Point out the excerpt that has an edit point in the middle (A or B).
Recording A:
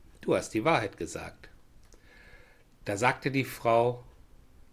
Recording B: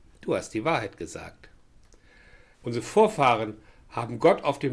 B